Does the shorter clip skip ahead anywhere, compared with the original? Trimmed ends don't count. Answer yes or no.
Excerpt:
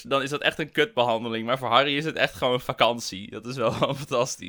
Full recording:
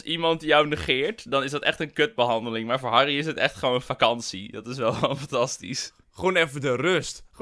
no